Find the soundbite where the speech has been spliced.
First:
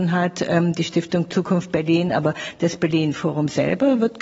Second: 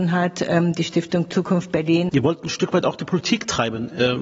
second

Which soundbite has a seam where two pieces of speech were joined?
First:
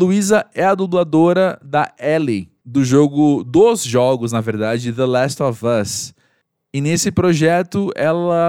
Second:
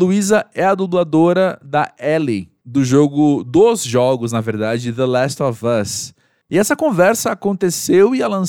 second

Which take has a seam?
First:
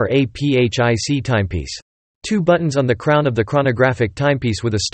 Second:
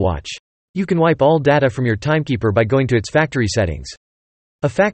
first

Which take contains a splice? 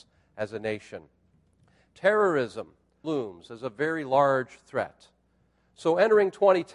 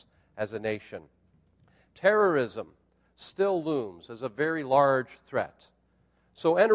first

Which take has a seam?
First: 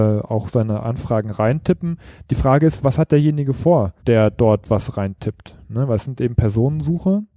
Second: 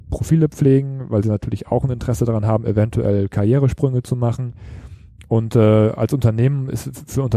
first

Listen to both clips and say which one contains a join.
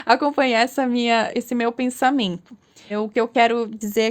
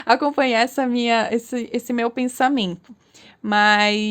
first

